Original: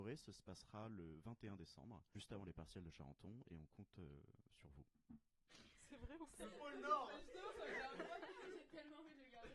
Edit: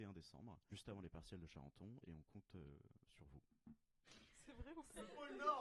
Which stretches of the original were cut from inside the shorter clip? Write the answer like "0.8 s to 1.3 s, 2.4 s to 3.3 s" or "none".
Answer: none